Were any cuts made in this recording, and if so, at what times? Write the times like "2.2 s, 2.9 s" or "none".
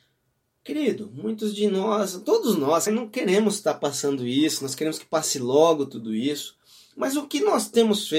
2.9 s